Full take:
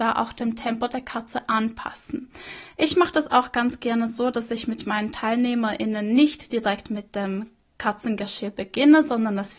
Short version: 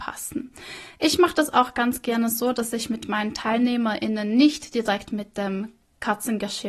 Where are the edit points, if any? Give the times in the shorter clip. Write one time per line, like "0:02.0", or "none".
none